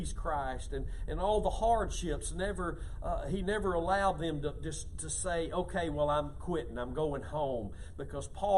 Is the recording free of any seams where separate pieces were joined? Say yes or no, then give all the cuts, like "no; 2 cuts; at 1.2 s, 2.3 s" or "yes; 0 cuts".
yes; 0 cuts